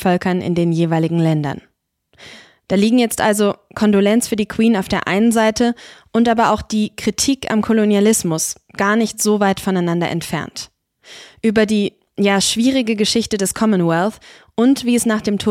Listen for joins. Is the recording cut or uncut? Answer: uncut